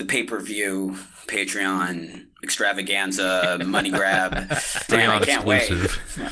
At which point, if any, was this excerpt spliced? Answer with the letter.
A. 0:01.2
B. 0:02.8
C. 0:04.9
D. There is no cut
C